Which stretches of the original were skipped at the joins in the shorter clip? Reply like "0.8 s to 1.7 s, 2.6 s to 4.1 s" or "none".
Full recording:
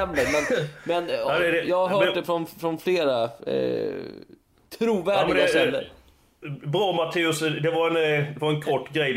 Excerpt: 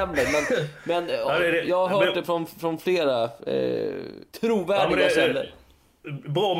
4.3 s to 4.7 s